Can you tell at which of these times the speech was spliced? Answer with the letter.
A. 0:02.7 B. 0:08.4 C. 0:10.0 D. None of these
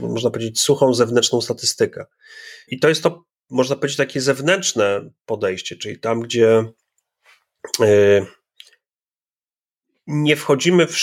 A